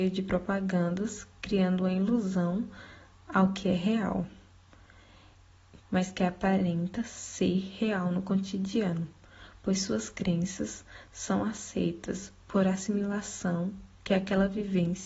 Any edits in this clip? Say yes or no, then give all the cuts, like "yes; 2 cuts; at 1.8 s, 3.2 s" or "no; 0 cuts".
yes; 1 cut; at 5.8 s